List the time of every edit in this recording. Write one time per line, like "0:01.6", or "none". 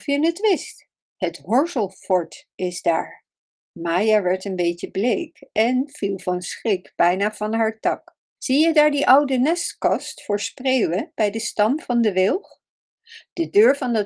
0:08.4